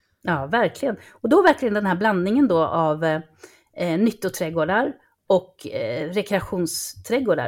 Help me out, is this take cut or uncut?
uncut